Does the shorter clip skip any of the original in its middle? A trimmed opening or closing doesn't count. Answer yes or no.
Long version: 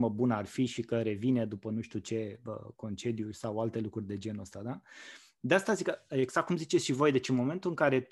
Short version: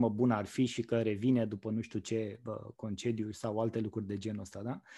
no